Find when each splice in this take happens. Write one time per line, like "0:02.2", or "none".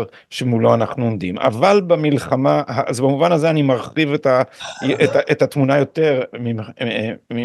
none